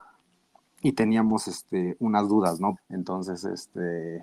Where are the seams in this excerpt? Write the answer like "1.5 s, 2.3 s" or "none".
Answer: 2.8 s